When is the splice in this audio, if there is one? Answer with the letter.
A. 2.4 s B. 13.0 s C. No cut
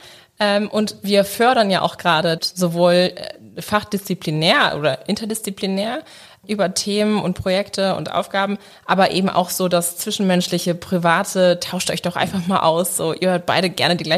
A